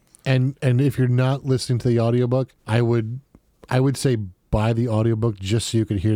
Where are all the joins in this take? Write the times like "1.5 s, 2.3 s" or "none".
2.6 s